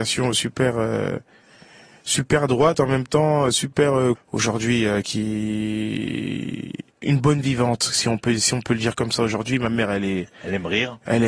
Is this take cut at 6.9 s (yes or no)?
yes